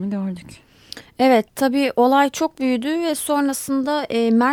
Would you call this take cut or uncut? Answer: uncut